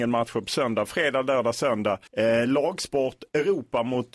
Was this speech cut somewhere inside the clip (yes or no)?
yes